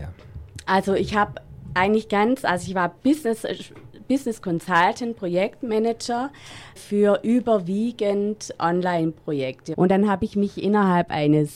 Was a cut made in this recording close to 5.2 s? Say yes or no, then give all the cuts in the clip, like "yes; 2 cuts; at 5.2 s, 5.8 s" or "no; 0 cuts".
no; 2 cuts; at 6.8 s, 9.7 s